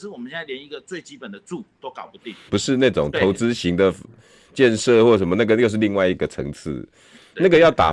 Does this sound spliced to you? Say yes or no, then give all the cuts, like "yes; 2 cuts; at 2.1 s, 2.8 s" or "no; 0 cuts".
yes; 1 cut; at 2.5 s